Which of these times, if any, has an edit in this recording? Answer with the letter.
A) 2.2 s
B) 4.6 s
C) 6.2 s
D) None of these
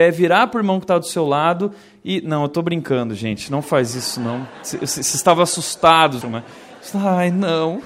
C